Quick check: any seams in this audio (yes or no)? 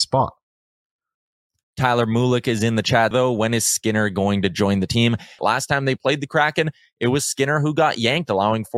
yes